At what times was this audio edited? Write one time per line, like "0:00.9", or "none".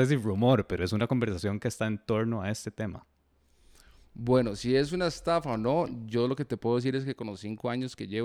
none

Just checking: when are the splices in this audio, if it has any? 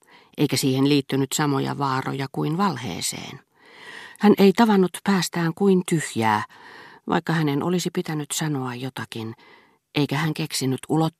0:04.2

